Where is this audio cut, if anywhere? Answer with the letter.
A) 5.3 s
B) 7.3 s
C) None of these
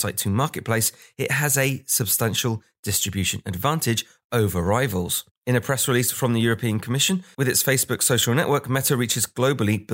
B